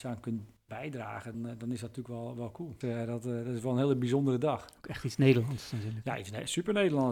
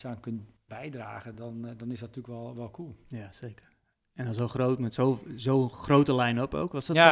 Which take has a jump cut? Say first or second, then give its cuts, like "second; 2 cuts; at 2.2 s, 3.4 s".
first; 2 cuts; at 1.3 s, 2.8 s